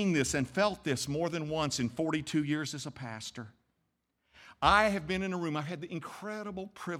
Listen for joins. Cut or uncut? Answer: uncut